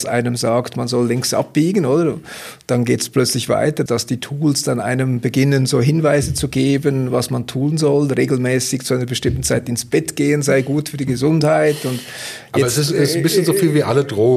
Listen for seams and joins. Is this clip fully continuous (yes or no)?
no